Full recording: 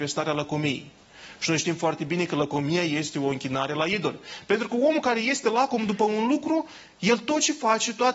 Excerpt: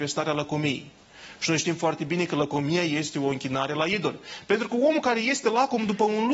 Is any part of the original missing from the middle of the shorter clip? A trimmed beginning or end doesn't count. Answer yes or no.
no